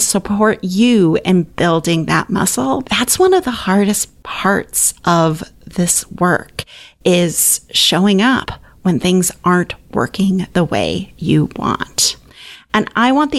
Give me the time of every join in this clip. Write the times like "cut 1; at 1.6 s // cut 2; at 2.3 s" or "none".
cut 1; at 2.8 s